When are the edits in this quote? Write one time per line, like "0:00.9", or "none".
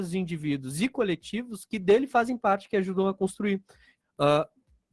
0:04.0